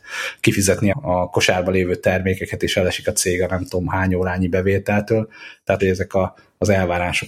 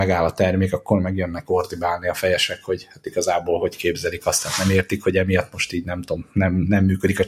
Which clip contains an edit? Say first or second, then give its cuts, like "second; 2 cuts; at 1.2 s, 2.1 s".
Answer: first; 2 cuts; at 0.9 s, 5.8 s